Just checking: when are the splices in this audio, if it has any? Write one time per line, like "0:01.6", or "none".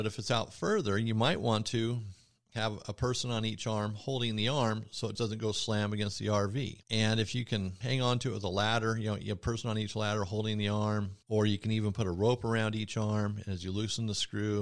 0:05.2
0:06.8